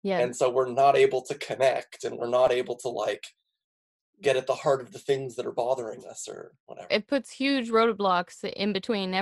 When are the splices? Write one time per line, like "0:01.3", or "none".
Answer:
0:06.9